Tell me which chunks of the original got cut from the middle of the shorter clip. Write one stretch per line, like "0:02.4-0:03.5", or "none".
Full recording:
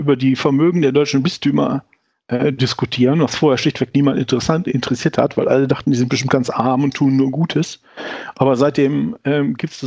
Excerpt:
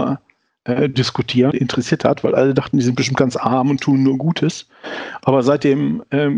0:03.1-0:04.6